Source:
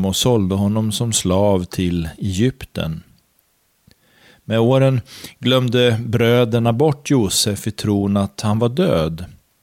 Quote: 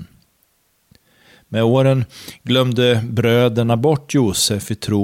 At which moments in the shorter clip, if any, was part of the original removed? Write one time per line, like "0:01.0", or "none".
none